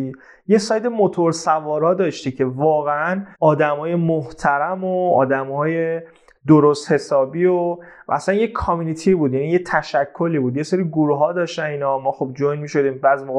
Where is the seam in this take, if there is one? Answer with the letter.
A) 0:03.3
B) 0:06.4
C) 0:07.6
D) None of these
A